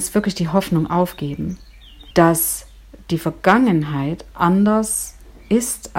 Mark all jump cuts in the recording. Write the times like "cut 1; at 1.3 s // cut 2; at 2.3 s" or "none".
cut 1; at 2.1 s